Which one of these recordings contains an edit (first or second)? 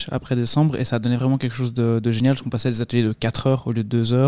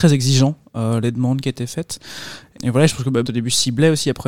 second